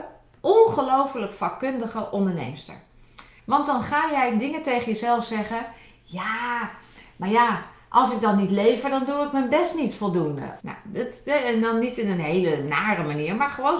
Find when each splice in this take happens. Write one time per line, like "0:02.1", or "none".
0:03.4
0:10.6